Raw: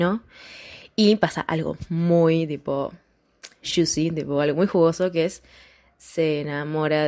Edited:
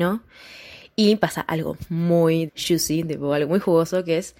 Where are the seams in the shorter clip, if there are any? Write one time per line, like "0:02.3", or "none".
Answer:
0:02.5